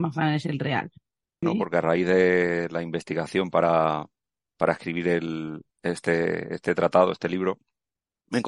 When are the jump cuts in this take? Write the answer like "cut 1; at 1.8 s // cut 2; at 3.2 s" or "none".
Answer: cut 1; at 1.4 s